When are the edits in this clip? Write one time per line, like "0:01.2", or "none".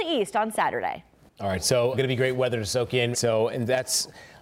0:01.9
0:03.1